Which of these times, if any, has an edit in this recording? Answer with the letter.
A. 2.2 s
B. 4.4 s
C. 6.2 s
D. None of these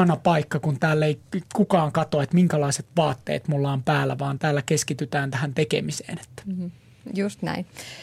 B